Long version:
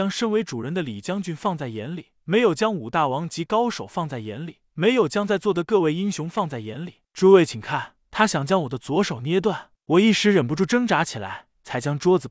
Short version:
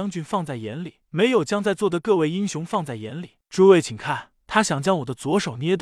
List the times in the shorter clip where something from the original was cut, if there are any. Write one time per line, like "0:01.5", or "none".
0:01.0